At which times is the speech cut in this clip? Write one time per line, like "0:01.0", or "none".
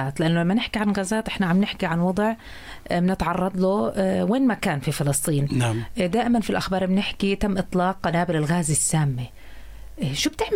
none